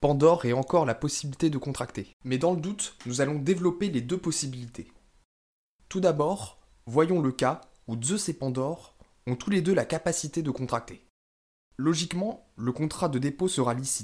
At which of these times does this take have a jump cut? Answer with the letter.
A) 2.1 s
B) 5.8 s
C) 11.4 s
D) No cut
A